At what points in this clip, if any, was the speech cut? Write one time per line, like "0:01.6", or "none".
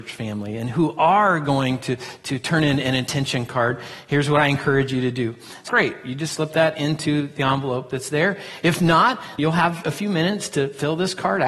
0:05.7
0:09.4